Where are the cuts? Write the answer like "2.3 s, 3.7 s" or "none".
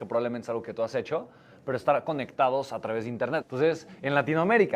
3.4 s